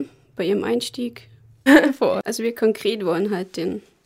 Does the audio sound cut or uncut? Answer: cut